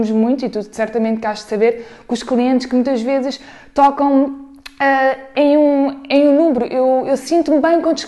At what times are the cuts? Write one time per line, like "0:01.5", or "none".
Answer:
none